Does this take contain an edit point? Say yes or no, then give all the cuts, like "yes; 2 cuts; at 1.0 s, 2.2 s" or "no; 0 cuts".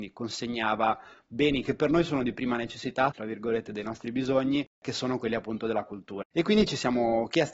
yes; 2 cuts; at 3.1 s, 6.2 s